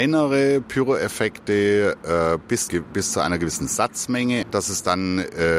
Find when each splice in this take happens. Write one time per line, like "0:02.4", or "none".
0:02.7
0:04.4